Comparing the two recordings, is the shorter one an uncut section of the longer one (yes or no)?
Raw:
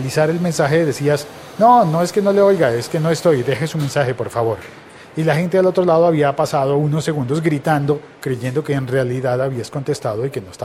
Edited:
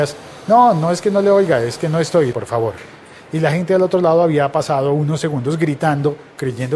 no